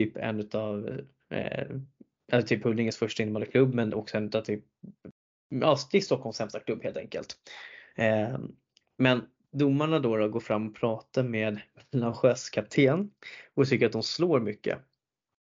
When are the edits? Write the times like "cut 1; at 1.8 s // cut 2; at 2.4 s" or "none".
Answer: none